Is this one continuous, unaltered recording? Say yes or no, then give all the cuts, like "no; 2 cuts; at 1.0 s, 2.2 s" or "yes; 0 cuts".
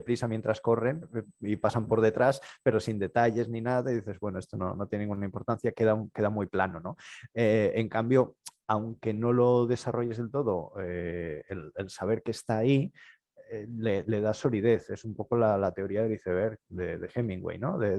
yes; 0 cuts